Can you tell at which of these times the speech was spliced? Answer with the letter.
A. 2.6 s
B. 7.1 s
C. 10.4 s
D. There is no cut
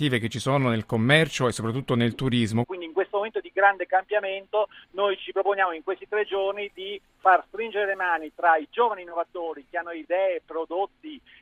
A